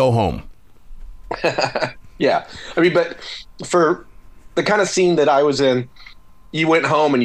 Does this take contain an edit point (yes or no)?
no